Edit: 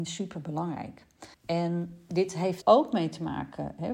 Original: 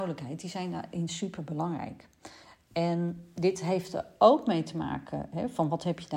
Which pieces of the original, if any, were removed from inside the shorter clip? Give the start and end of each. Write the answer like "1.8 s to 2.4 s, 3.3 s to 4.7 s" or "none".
2.4 s to 2.6 s, 3.9 s to 4.2 s